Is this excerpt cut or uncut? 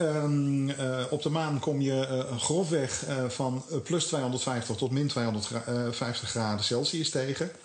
uncut